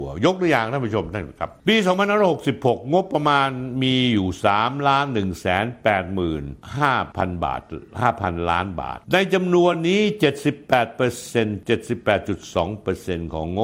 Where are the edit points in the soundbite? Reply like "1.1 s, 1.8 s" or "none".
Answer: none

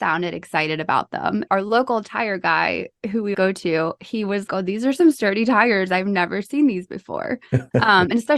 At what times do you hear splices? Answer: 1.5 s, 3.3 s, 4.5 s

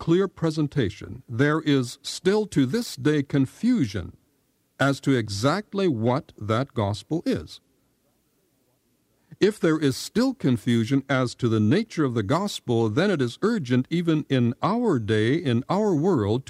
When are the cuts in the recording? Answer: none

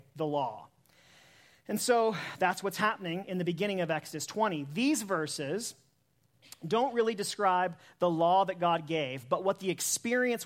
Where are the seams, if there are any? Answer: none

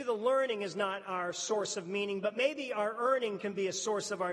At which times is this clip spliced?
none

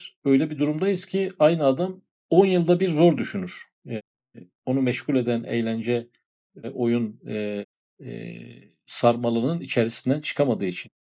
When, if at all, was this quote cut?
none

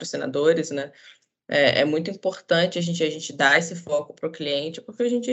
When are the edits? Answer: none

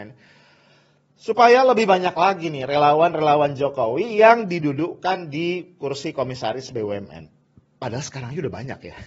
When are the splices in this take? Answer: none

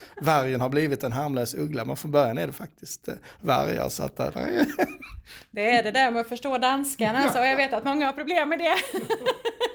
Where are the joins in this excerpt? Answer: none

